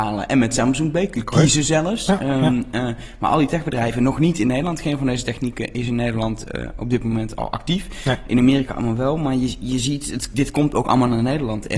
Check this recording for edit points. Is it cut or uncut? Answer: uncut